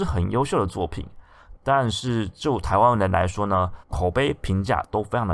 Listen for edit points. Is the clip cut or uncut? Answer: cut